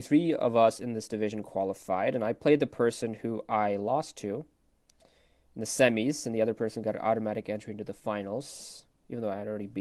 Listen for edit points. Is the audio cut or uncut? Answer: uncut